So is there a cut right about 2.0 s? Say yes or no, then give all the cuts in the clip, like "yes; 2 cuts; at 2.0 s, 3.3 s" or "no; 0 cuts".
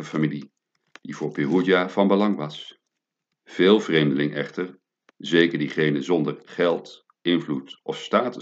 no; 1 cut; at 3.3 s